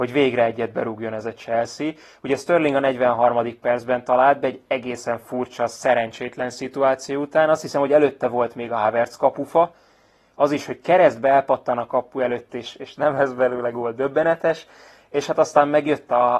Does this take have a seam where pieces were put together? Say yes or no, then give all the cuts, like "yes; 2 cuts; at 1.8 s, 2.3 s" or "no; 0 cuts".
no; 0 cuts